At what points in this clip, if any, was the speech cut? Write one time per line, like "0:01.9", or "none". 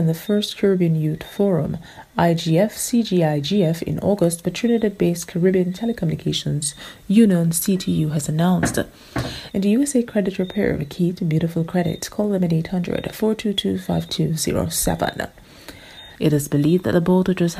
0:09.5
0:16.2